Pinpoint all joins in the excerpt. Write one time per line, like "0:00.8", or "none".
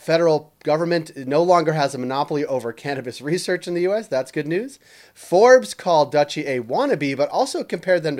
none